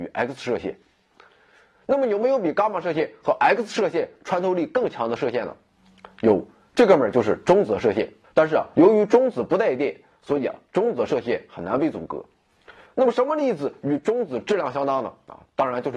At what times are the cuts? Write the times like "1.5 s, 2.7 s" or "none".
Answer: 8.2 s, 12.9 s